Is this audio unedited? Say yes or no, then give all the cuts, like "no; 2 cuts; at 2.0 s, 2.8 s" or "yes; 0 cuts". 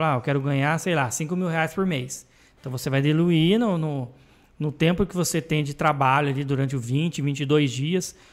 yes; 0 cuts